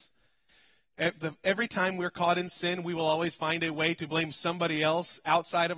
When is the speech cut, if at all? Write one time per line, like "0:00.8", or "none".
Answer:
none